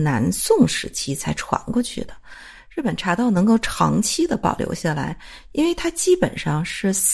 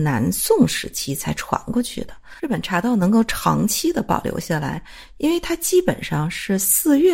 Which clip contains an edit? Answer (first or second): second